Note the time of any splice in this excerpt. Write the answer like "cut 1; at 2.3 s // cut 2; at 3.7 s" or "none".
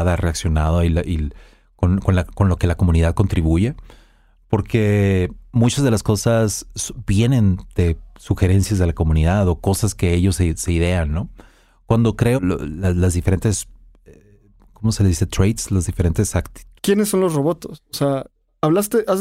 cut 1; at 12.4 s // cut 2; at 16.8 s